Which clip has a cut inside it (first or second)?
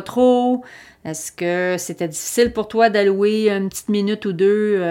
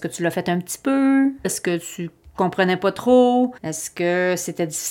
second